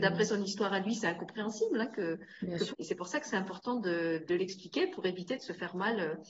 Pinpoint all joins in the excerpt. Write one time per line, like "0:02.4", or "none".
0:02.7